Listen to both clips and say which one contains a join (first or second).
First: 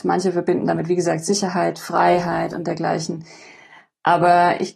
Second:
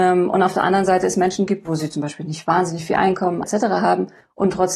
second